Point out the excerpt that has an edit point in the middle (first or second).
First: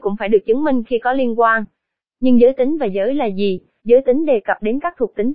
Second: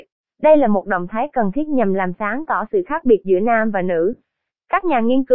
first